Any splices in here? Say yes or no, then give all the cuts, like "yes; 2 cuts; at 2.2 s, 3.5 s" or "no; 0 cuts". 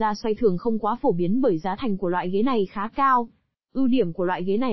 yes; 1 cut; at 3.5 s